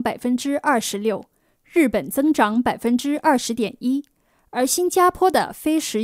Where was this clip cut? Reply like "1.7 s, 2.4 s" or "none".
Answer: none